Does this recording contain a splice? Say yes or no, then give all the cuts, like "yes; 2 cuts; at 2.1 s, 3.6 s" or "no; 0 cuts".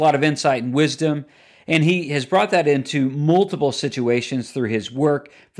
no; 0 cuts